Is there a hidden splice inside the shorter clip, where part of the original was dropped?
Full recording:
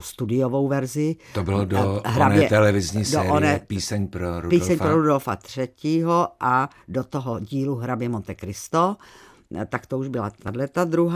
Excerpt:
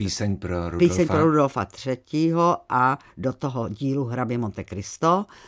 no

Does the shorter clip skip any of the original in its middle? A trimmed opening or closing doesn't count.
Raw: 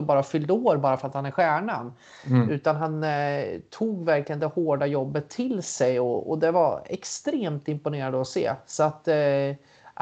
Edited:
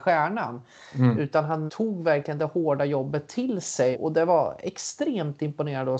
yes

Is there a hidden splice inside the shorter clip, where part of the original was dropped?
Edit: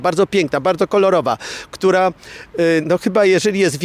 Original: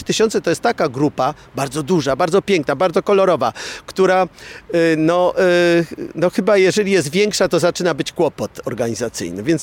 yes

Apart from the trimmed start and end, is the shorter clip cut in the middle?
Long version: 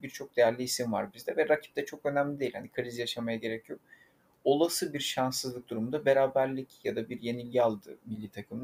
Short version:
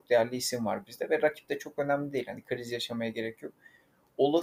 no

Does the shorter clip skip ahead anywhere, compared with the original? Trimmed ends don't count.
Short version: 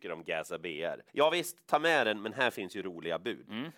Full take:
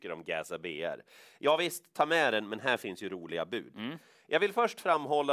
yes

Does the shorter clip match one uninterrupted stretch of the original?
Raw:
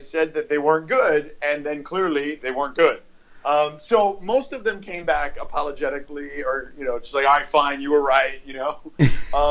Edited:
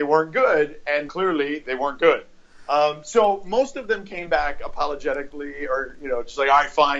no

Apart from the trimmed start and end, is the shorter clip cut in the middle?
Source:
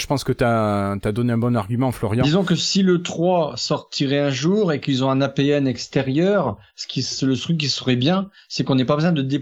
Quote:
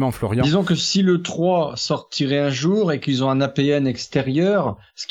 no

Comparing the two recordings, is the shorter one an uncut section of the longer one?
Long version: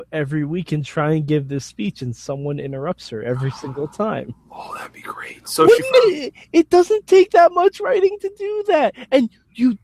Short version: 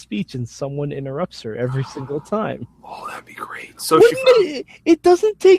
yes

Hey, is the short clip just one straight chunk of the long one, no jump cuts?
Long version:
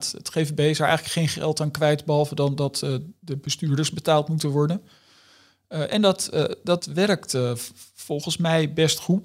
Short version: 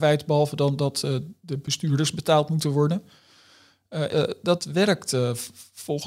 no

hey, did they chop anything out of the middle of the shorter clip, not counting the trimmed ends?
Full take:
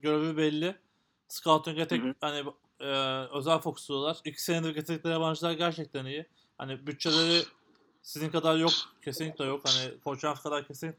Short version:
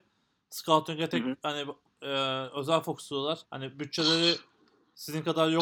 yes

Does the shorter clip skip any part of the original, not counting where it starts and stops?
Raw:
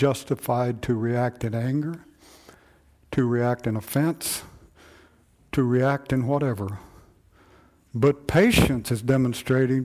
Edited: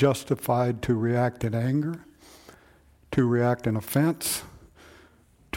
no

